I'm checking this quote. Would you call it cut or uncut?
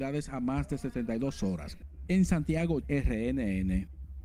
cut